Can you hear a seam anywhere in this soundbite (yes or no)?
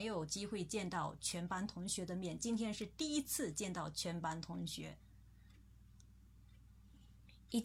no